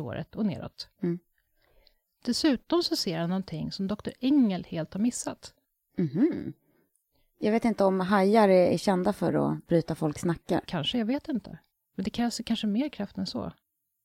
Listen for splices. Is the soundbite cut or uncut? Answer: cut